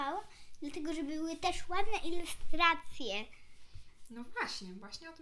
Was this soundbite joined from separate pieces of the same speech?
no; 0 cuts

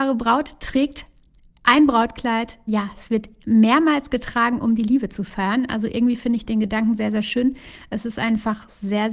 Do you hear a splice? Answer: yes; 1 cut; at 2.7 s

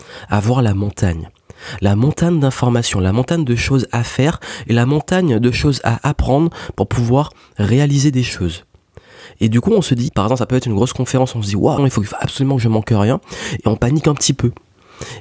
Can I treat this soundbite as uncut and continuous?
no; 3 cuts; at 10.1 s, 11.8 s, 13.6 s

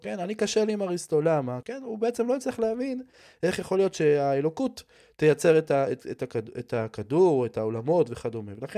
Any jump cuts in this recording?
yes; 1 cut; at 1.6 s

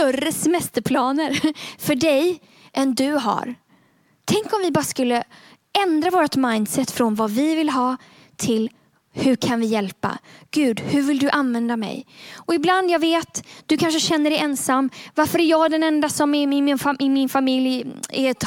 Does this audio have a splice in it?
no; 0 cuts

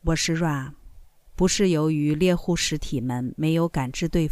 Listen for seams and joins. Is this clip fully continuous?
no; 1 cut; at 1.3 s

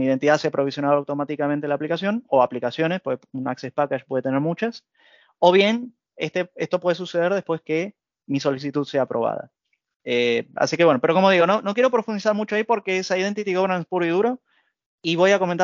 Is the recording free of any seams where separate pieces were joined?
yes; 0 cuts

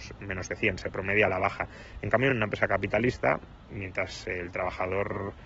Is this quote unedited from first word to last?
yes; 0 cuts

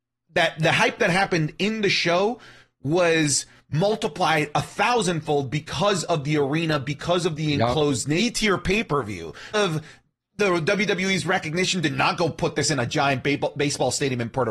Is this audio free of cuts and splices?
no; 2 cuts; at 8.2 s, 9.5 s

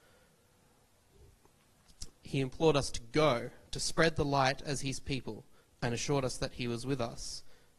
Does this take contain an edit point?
yes; 2 cuts; at 2.1 s, 3.7 s

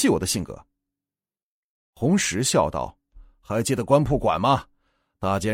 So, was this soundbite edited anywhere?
no; 0 cuts

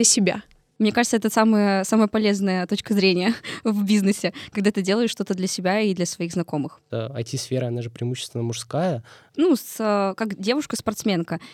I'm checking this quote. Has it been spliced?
yes; 2 cuts; at 6.9 s, 9.3 s

